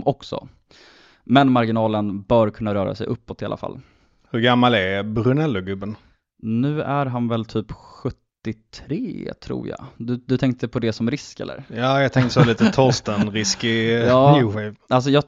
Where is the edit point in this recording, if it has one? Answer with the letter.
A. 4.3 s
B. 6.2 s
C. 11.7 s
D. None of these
D